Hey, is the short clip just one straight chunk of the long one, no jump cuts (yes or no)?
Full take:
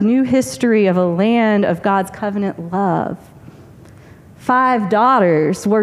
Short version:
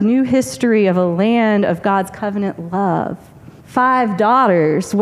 no